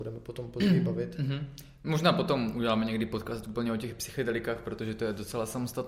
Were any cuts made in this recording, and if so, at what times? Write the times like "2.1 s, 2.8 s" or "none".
none

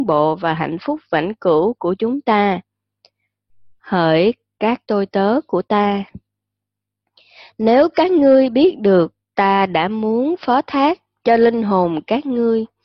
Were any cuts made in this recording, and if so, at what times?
9.2 s

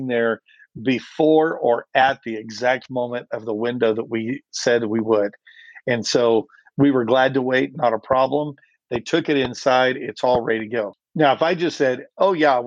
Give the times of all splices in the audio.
none

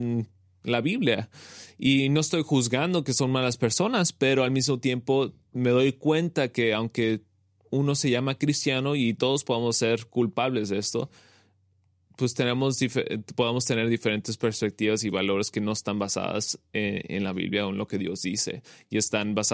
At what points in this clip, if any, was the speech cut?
none

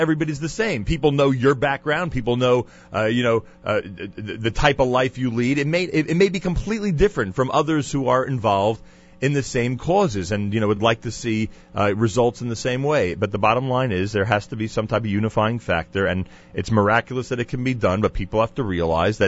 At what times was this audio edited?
none

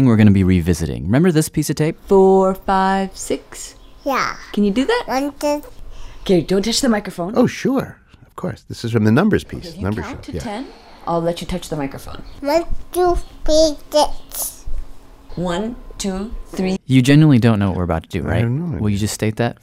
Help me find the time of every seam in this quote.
16.8 s

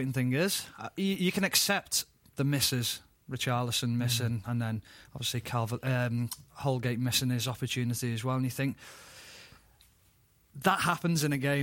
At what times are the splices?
none

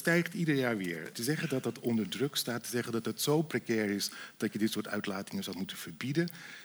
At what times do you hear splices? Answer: 1.1 s

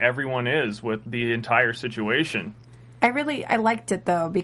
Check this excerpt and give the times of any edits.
none

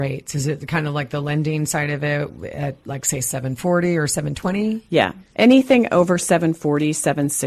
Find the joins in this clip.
none

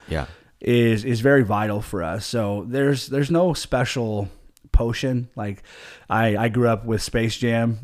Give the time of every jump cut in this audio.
none

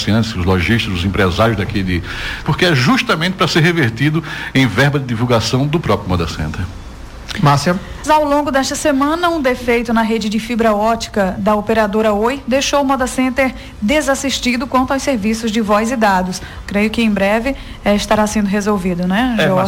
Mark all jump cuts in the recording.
2.4 s, 8.0 s, 16.6 s

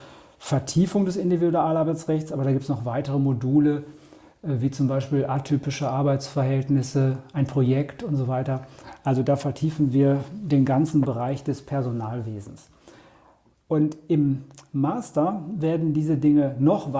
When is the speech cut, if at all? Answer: none

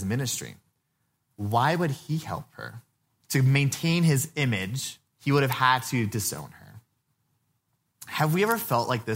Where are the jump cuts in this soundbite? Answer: 3.2 s, 5.1 s

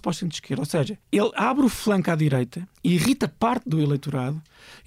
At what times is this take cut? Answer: 1.0 s, 2.7 s

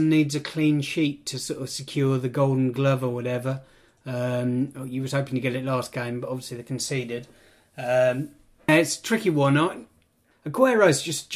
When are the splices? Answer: 8.7 s, 10.3 s

